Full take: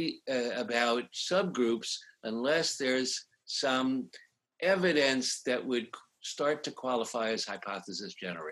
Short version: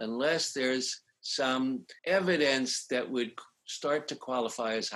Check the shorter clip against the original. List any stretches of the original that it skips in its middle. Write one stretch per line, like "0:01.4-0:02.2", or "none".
0:04.2-0:04.5

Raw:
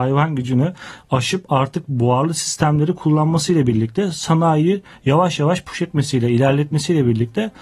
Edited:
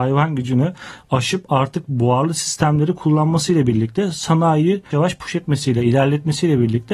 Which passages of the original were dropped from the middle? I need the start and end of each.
0:04.9-0:05.4

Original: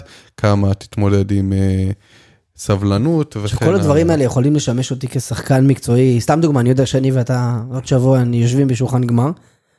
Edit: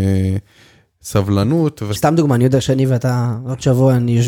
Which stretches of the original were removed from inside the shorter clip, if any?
0:03.5-0:06.2

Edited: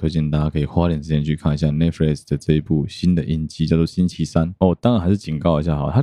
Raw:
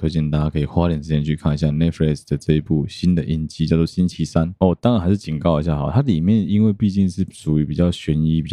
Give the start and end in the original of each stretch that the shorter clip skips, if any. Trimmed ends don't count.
none

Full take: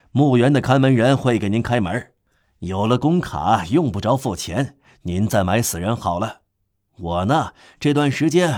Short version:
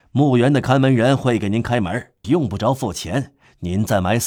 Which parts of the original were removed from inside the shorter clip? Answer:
0:02.2-0:03.7

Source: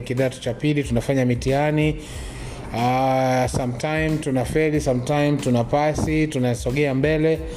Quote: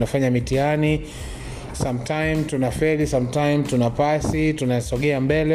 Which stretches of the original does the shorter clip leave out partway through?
0:02.7-0:03.5

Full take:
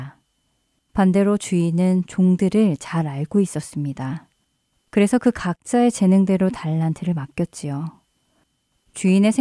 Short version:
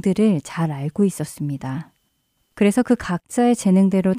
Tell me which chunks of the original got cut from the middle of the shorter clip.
none

